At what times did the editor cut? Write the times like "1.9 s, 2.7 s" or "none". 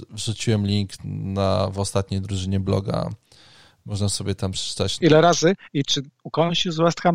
5.0 s